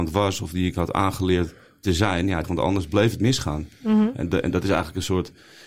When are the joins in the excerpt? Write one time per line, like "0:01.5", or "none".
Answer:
0:02.4